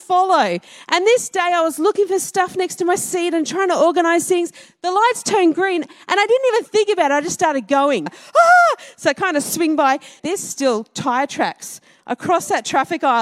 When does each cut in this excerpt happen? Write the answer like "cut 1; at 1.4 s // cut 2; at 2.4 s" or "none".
cut 1; at 8.1 s // cut 2; at 10.2 s